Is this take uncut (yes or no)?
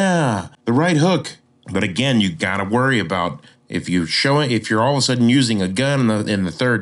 no